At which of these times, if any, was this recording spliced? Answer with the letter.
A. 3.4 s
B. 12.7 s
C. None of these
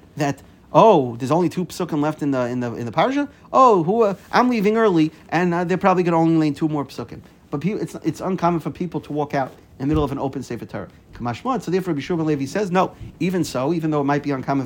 C